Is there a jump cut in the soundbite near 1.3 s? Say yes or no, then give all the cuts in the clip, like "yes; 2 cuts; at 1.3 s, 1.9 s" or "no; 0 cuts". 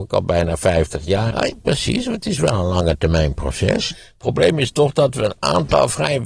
yes; 2 cuts; at 1.3 s, 3.9 s